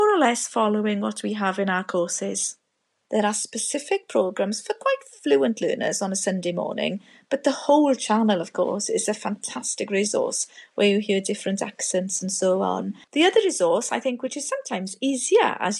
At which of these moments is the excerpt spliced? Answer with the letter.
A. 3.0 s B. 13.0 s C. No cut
B